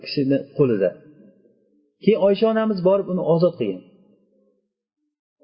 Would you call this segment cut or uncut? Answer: uncut